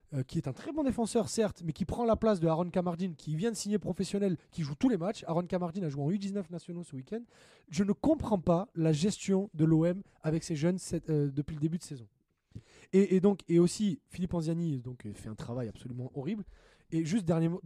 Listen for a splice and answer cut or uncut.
uncut